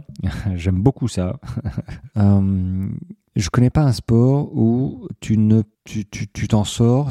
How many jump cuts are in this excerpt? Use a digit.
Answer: 2